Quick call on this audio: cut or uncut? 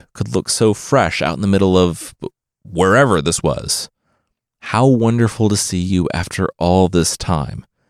uncut